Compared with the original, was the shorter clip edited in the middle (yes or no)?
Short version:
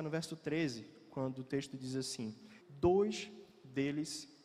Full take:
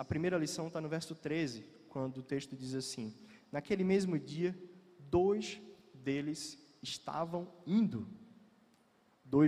yes